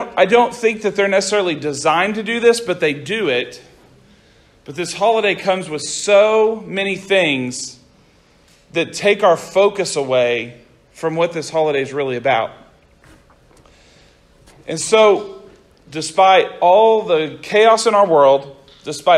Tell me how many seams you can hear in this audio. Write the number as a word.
one